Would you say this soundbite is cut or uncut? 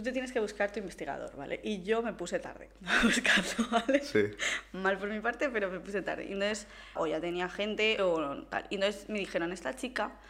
cut